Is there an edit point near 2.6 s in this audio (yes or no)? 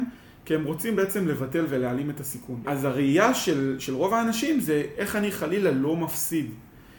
yes